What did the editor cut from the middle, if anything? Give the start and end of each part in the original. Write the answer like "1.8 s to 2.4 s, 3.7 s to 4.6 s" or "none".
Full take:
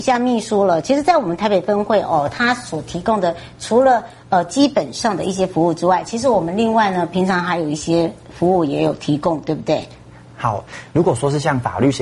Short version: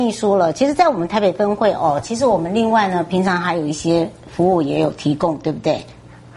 2.3 s to 6.1 s